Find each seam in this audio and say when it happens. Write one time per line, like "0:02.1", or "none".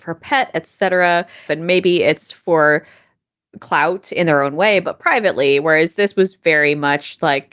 0:01.5